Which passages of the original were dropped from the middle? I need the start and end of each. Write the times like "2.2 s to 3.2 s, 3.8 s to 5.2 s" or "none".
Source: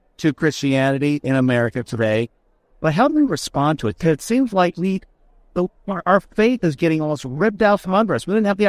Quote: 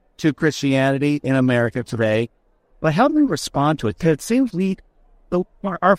4.5 s to 4.7 s

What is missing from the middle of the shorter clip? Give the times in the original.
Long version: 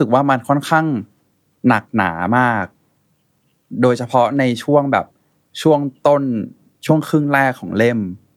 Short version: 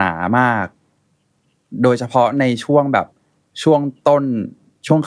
none

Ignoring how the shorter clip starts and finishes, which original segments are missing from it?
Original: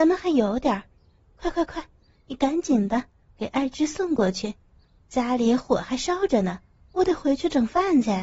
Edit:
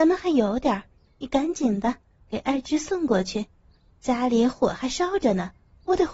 1.1 s to 2.1 s

